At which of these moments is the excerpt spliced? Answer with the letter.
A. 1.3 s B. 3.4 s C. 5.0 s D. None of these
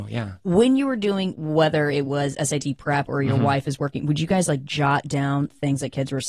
A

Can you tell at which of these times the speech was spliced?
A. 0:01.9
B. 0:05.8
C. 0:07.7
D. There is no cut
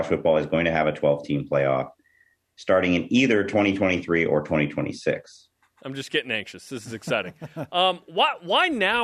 B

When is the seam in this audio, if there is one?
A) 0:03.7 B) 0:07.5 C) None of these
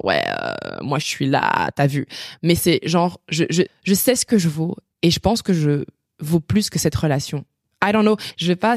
A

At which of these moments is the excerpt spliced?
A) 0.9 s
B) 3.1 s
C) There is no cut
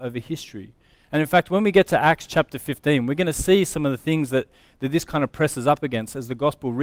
A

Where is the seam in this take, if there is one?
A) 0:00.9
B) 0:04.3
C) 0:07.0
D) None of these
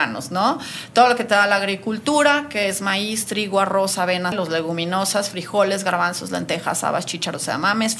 B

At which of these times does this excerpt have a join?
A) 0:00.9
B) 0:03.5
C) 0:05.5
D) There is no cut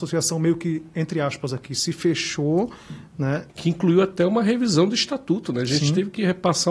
B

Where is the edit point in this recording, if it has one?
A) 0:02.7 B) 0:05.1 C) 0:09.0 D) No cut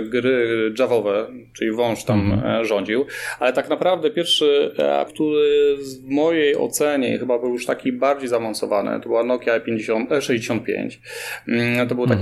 B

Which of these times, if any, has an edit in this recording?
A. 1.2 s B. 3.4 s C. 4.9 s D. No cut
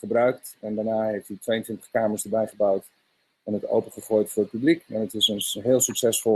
D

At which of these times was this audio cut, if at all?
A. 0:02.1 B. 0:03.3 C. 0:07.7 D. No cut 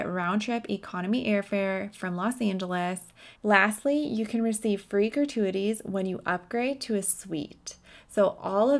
B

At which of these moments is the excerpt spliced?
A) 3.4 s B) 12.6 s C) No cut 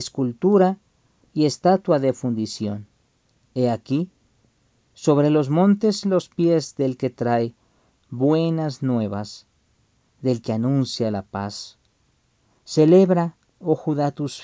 A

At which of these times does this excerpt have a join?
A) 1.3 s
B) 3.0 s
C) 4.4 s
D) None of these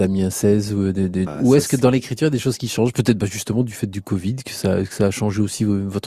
A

